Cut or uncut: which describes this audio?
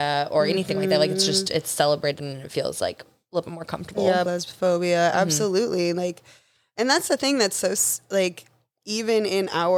cut